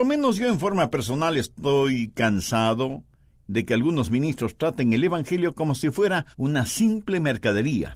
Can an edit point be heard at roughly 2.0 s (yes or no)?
no